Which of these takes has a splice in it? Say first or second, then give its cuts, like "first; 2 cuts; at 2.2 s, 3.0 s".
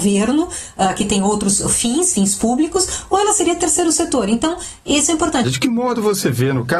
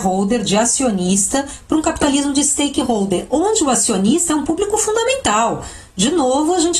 first; 1 cut; at 5.4 s